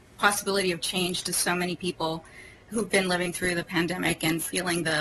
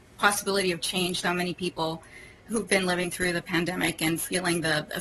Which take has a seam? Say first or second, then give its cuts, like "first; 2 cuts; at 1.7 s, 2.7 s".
second; 1 cut; at 1.2 s